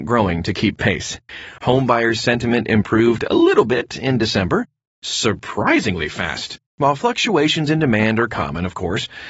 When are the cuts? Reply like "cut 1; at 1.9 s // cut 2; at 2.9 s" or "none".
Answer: cut 1; at 4.9 s // cut 2; at 6.7 s